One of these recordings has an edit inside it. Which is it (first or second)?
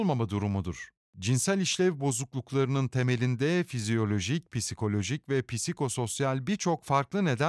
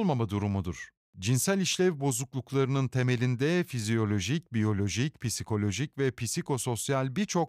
first